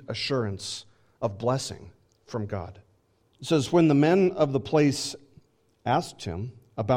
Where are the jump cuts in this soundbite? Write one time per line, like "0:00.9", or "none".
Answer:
0:03.2